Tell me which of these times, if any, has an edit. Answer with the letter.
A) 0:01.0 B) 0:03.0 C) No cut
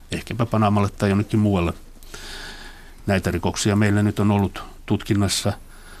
B